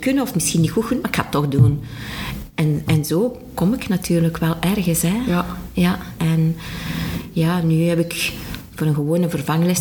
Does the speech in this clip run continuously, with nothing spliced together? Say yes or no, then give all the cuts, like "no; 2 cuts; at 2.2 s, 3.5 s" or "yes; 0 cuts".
no; 1 cut; at 6.2 s